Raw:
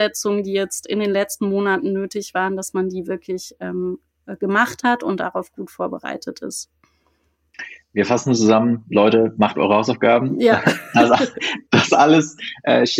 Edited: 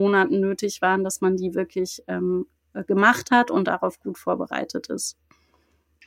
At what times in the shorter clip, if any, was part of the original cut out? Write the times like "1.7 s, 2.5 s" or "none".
none